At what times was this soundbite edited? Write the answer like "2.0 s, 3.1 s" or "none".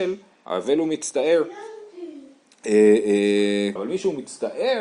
3.8 s